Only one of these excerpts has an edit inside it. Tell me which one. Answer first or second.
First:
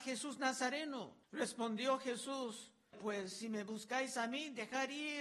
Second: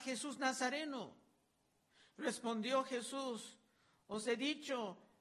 first